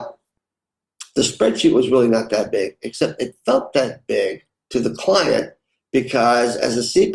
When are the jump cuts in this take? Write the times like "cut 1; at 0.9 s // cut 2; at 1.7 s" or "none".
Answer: none